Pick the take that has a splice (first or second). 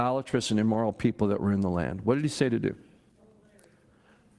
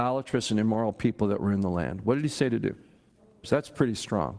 second